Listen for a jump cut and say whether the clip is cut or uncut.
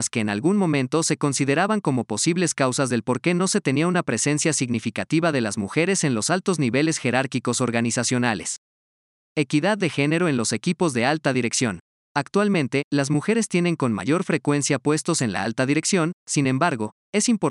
uncut